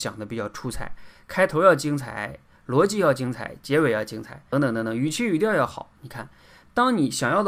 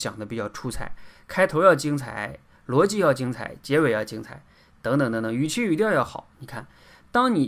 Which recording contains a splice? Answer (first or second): first